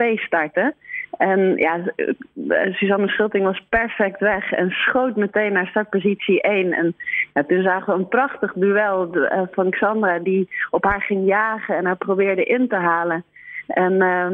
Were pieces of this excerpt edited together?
no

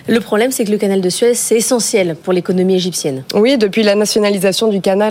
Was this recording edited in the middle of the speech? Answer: no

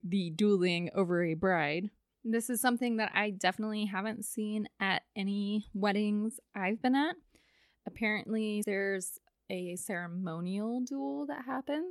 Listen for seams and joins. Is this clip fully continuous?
no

